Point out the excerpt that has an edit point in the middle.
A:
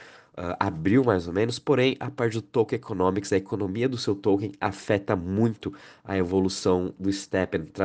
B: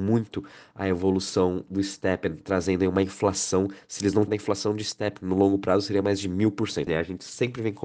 B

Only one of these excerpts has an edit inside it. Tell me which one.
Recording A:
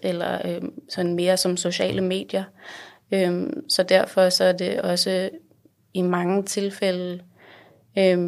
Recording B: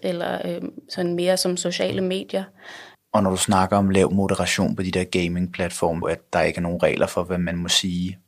B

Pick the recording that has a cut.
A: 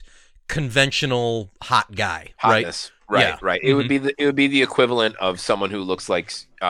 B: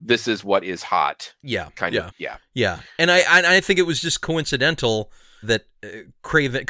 B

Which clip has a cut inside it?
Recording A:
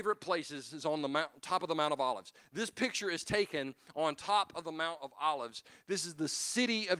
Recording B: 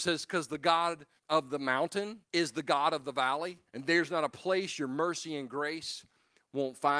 B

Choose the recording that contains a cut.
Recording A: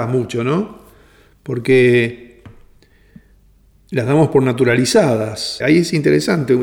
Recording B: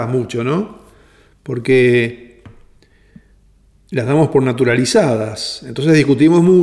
A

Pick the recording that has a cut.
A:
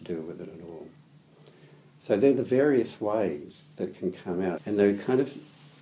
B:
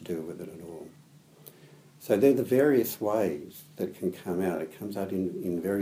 A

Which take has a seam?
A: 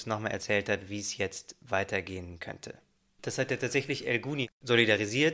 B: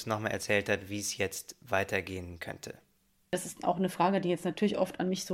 A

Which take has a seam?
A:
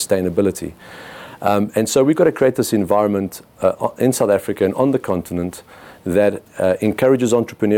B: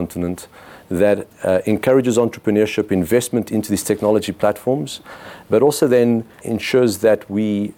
B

